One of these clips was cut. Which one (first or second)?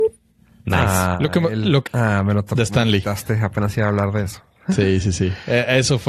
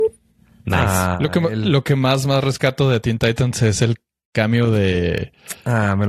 first